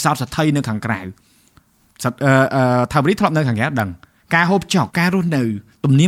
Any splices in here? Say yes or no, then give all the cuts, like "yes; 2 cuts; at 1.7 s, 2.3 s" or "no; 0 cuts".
yes; 1 cut; at 4.9 s